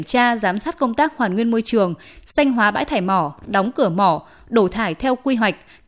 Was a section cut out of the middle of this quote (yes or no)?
no